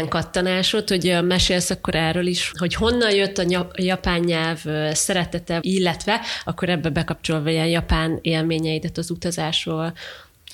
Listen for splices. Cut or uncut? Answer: cut